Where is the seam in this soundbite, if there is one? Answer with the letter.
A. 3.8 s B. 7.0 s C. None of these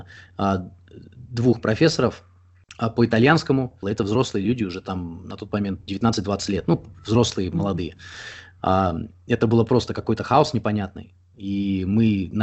A